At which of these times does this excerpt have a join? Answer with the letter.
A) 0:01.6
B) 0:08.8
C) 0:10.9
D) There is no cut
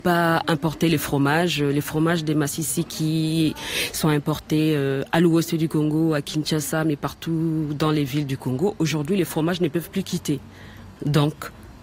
D